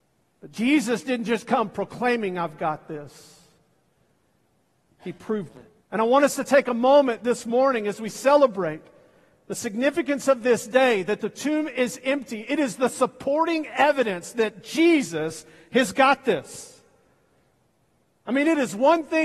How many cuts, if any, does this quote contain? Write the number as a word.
one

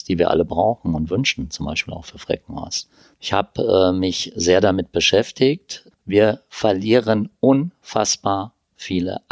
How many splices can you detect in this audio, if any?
two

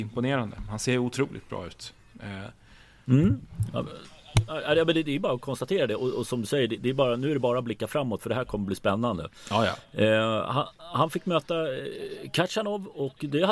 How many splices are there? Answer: zero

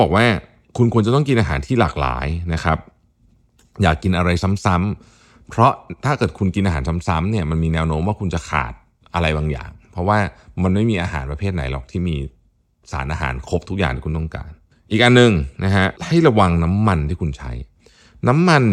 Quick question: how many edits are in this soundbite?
one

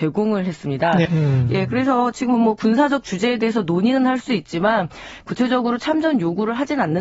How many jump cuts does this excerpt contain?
one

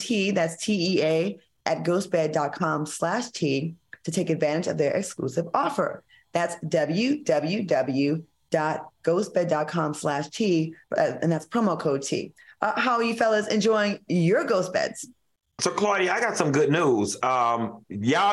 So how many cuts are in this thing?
one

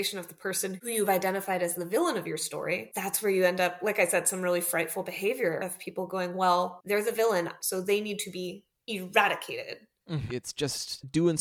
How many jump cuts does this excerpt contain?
two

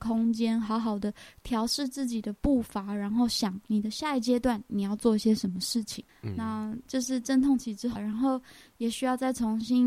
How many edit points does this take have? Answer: two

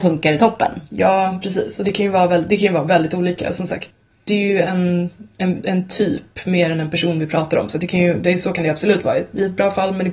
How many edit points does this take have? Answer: zero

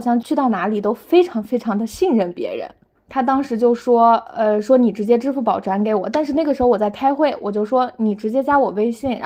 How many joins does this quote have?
zero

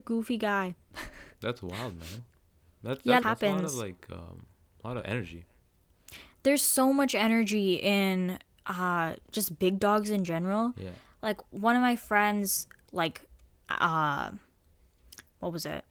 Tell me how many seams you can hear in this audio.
two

